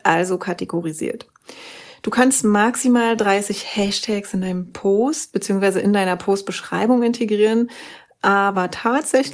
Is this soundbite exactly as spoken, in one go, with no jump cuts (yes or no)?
yes